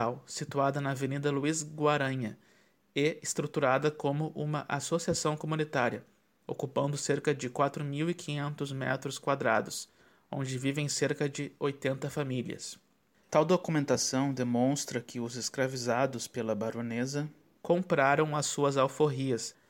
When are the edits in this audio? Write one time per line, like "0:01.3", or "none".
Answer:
0:13.3

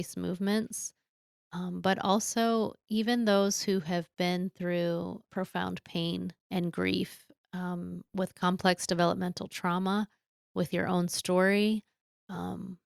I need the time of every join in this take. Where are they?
0:05.3
0:06.4

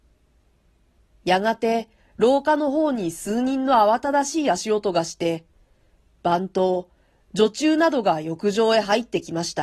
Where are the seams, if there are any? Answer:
0:06.1

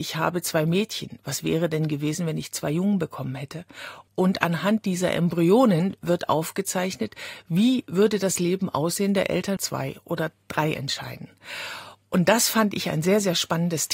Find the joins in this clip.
0:04.1
0:09.6

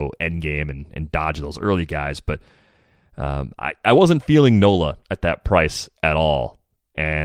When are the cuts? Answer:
none

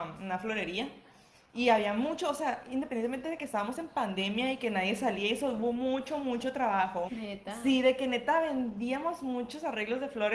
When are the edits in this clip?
0:07.1

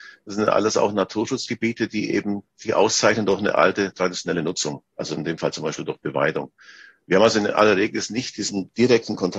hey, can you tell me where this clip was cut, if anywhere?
none

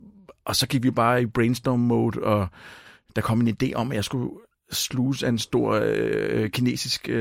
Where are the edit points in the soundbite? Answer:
none

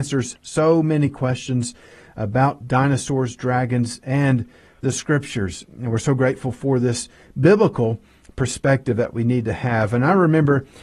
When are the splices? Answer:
none

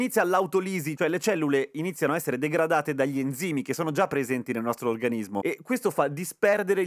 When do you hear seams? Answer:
0:01.0

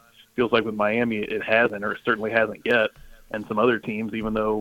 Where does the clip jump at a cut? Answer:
none

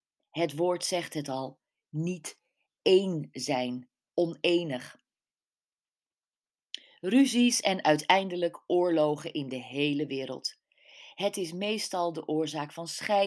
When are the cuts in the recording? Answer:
none

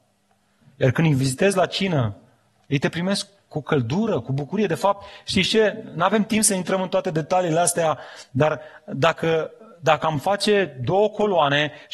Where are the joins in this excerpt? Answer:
none

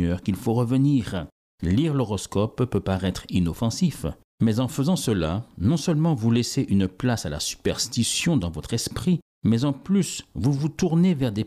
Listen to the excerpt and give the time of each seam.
none

